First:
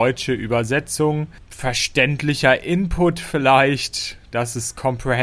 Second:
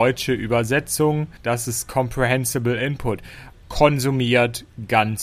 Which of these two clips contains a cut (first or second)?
second